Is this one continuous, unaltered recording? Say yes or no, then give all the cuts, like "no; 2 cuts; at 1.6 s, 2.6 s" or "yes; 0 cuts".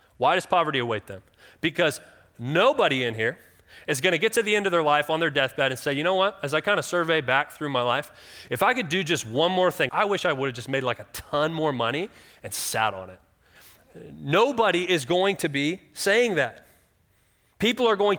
no; 2 cuts; at 9.9 s, 13.6 s